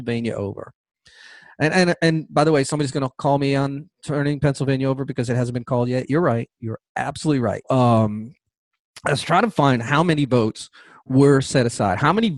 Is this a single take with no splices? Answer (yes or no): no